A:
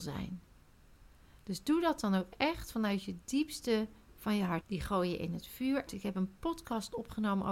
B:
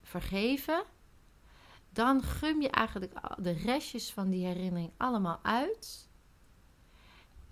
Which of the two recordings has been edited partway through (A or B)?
A